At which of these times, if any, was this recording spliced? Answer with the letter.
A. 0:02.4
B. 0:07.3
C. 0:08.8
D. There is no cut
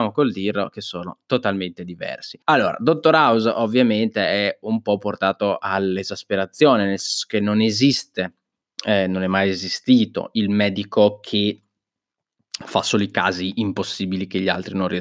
A